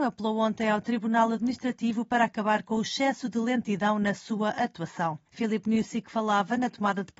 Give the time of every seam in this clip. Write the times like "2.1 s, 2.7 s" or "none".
5.3 s